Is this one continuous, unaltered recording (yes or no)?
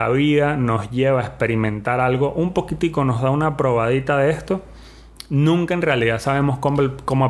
yes